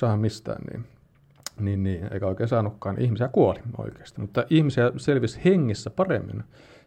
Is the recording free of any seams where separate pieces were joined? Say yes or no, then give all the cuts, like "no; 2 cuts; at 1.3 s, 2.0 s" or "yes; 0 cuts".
yes; 0 cuts